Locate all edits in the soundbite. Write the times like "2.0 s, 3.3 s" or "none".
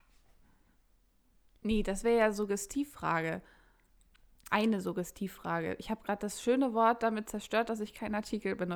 none